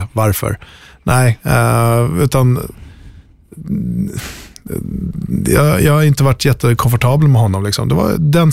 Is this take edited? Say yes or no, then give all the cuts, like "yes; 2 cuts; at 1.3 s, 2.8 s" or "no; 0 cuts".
no; 0 cuts